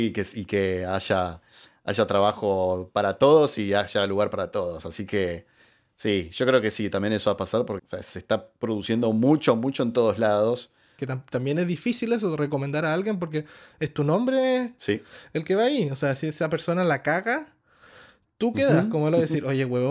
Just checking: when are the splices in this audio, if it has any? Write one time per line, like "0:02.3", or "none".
0:07.8
0:11.0